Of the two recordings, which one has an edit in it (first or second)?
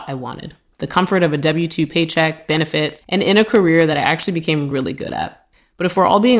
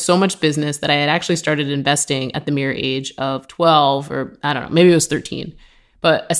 first